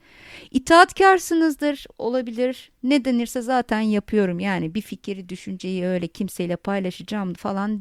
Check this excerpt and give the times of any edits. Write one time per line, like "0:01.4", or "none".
none